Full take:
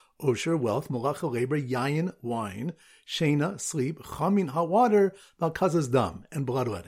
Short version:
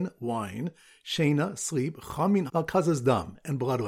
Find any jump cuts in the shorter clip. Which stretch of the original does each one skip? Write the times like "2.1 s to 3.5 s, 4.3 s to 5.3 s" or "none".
4.5 s to 5.4 s